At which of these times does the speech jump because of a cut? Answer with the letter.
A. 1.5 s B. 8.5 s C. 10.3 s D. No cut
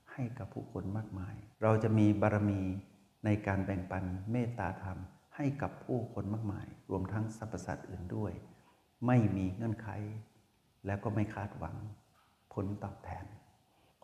A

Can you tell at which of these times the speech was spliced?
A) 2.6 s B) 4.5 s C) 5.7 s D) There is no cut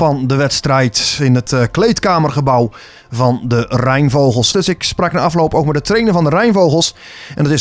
B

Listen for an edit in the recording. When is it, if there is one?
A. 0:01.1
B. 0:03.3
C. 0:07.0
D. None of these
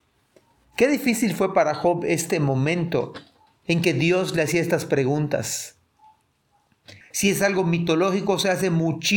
C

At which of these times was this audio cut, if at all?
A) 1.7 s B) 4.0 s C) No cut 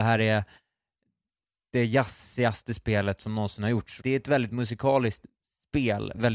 B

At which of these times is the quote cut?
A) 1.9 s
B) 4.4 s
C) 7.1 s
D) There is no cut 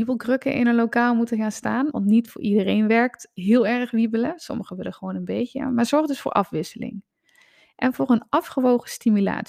A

